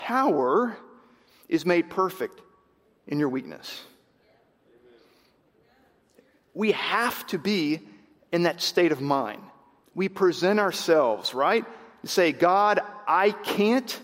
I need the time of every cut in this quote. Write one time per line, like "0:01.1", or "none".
0:09.8